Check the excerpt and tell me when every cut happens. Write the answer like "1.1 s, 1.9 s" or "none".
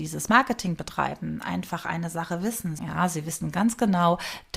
2.8 s